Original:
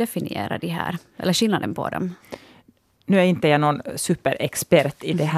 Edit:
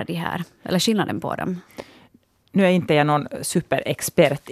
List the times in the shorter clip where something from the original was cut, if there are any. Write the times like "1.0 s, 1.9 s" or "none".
none